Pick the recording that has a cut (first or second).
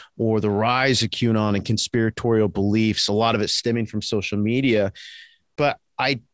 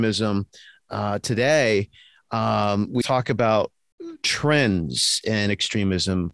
second